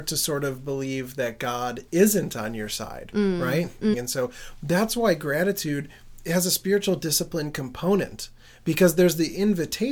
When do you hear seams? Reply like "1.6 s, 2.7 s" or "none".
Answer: 3.9 s